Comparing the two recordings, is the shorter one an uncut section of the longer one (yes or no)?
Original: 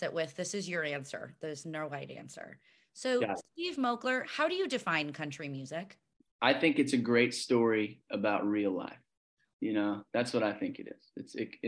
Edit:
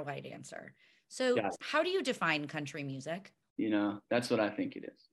no